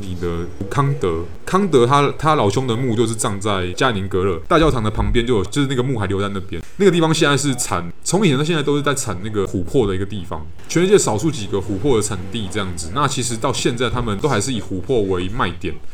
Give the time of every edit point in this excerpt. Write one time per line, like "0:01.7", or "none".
none